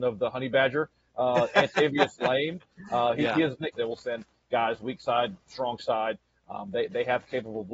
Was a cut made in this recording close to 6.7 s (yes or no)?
no